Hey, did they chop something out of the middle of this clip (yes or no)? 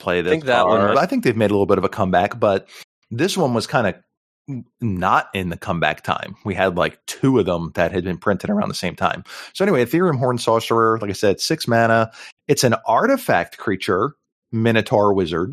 yes